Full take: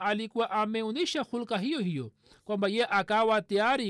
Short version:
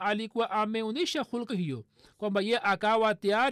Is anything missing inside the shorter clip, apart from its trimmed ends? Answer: yes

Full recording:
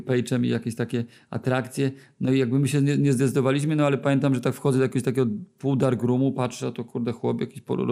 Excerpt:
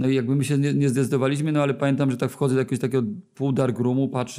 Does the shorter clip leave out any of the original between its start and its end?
no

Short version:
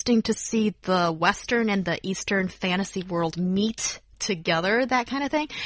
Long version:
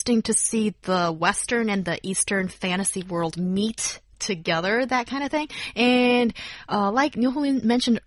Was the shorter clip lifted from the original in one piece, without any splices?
yes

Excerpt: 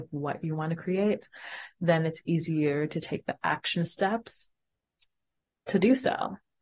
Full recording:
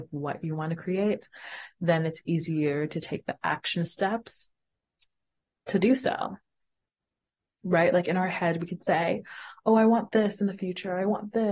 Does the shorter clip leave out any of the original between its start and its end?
no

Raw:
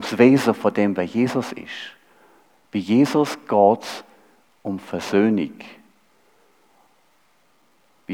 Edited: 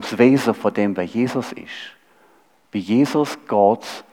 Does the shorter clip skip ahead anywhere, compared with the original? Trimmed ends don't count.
no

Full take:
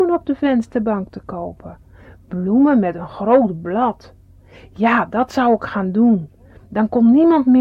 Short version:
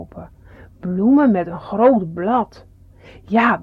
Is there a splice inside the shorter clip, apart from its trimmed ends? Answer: no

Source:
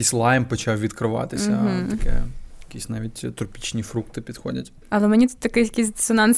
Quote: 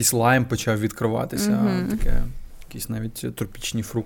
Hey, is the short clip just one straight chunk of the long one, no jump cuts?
yes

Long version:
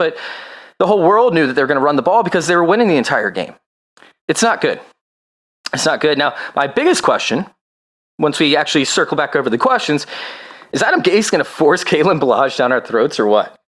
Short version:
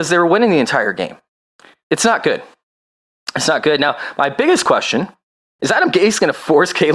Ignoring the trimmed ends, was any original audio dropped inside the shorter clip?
yes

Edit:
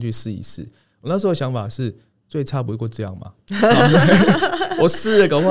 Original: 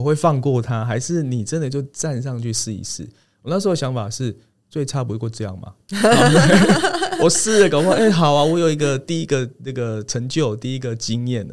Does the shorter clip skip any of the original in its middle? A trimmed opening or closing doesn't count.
no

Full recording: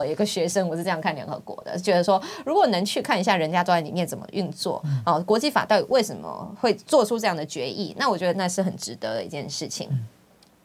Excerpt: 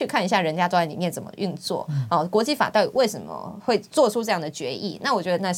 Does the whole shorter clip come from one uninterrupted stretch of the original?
yes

